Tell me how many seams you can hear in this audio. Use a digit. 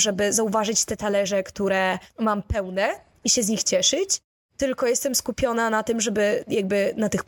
1